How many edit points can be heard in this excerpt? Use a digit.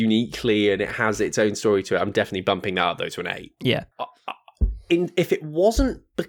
1